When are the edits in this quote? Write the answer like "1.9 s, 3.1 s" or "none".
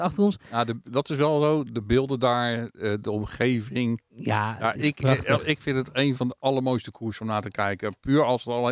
none